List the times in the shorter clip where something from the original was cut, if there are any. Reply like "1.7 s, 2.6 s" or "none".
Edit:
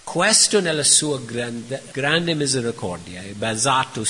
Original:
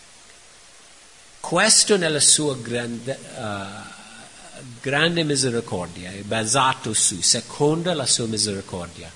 1.9 s